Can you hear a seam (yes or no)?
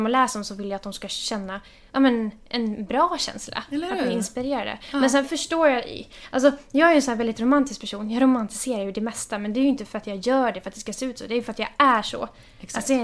no